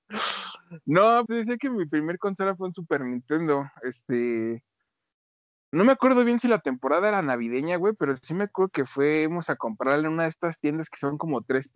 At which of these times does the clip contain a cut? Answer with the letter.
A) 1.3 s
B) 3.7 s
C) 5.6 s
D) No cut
A